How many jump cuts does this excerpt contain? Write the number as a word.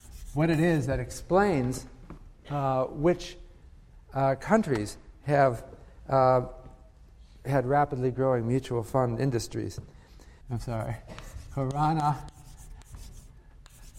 one